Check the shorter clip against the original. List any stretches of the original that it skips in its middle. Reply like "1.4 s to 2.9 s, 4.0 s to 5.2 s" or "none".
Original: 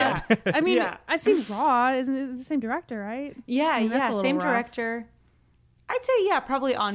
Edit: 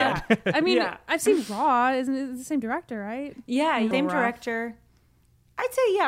3.9 s to 4.2 s